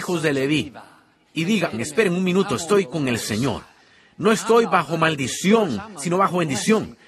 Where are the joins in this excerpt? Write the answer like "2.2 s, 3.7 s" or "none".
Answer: 1.7 s